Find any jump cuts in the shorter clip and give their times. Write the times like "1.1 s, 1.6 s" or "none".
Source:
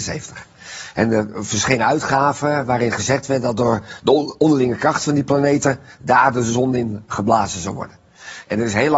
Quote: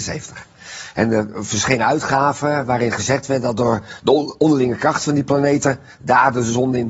none